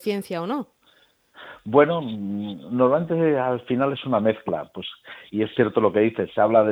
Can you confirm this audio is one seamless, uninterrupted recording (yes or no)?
yes